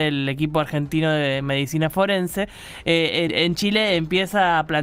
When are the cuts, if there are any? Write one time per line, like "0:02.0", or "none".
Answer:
0:03.3